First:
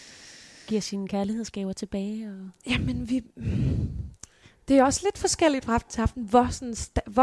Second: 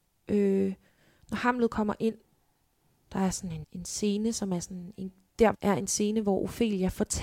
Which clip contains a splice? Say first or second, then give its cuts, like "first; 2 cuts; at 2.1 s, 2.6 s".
second; 2 cuts; at 3.6 s, 5.5 s